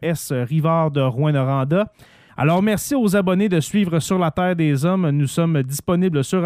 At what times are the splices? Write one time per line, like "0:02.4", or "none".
0:02.3